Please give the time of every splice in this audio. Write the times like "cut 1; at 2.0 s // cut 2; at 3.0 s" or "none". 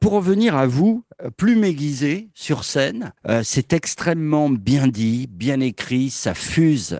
cut 1; at 3.2 s